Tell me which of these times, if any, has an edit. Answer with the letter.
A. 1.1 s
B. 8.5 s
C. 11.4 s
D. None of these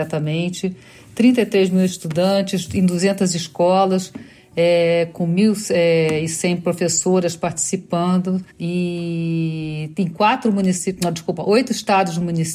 B